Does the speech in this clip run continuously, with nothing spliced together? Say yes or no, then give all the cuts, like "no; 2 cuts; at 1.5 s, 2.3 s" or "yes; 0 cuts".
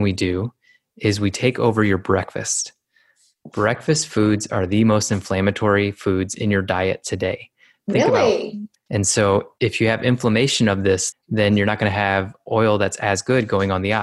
no; 2 cuts; at 8.8 s, 11.1 s